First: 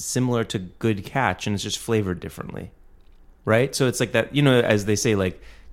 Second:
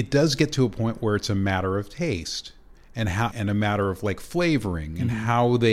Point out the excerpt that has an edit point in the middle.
second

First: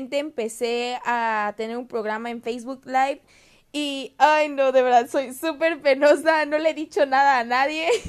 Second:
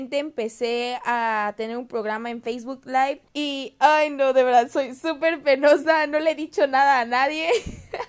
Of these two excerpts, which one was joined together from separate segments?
second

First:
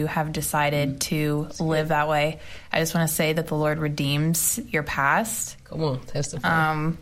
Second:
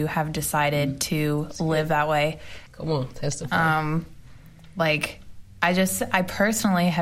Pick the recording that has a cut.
second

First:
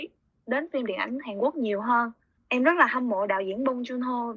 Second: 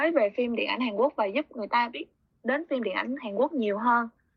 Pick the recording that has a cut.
first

